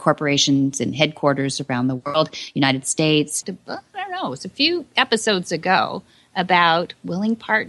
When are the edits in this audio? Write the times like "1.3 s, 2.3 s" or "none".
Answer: 3.4 s